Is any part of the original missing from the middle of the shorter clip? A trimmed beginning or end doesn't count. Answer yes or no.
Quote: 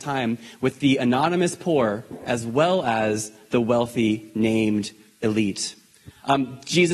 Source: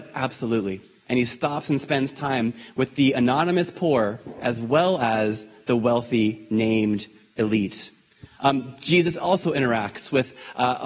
no